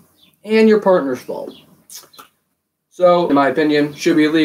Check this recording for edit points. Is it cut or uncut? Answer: cut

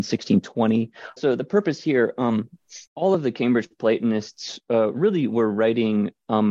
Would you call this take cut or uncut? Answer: cut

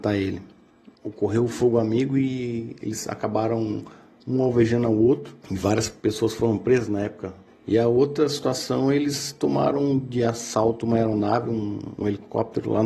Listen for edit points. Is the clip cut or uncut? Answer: cut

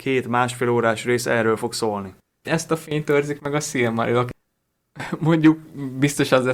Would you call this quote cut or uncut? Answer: cut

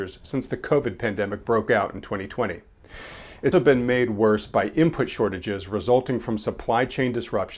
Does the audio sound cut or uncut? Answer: cut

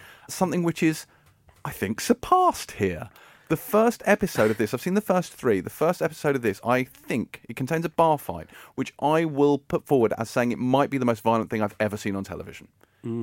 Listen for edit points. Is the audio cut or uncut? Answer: uncut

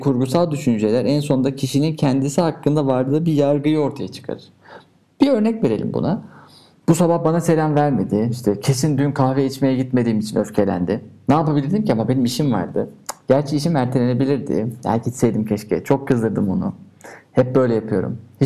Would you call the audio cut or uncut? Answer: cut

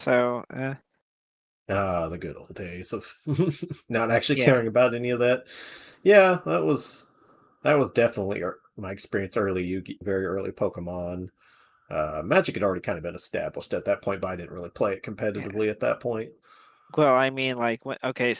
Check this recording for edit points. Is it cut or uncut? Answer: cut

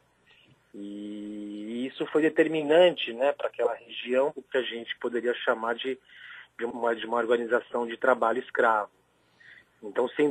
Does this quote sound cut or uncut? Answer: cut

